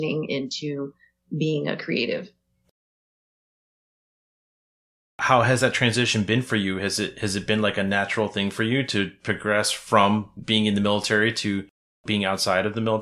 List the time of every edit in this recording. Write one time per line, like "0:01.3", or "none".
none